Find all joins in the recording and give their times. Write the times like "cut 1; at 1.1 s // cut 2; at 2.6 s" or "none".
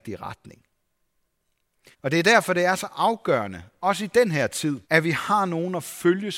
cut 1; at 1.9 s // cut 2; at 4.8 s